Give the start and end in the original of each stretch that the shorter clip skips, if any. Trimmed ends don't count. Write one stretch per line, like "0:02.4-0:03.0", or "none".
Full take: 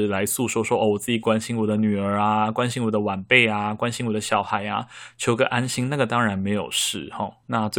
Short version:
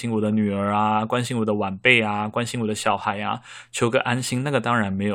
none